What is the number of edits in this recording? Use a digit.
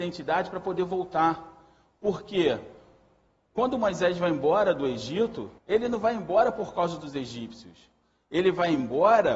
1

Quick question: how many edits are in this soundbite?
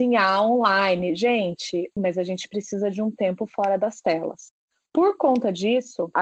1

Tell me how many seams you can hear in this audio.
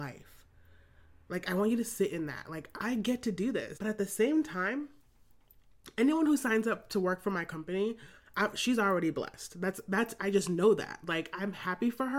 1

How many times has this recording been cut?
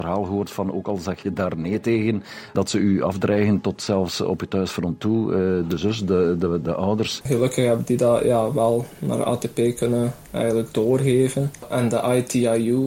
2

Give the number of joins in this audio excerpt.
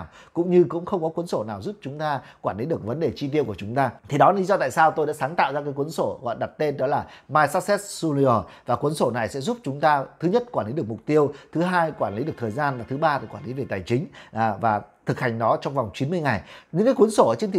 1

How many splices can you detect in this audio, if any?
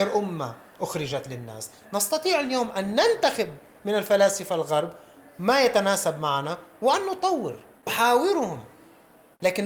1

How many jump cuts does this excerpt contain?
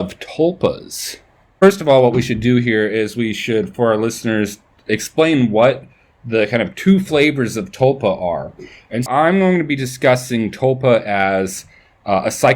1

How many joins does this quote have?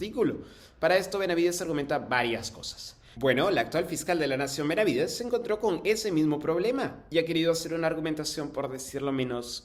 1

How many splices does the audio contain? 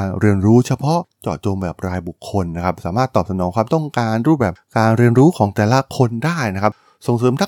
0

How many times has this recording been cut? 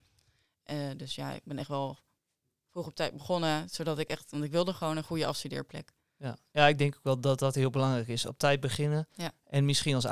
0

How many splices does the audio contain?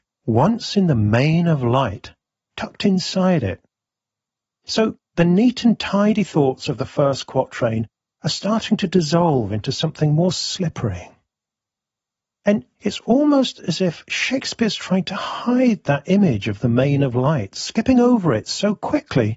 0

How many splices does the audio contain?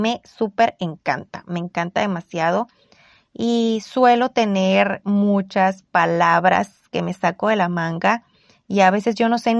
0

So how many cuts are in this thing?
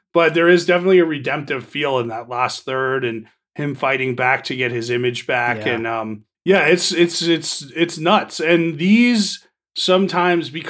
0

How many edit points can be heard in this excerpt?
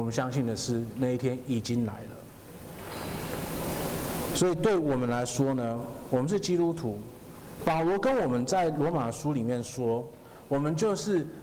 1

